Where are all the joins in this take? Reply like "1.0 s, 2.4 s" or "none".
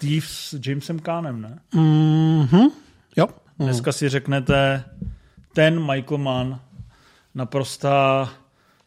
3.5 s